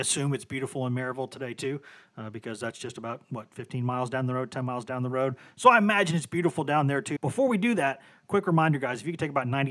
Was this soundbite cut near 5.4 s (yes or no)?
no